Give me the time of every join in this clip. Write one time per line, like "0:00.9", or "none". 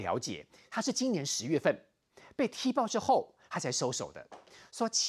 none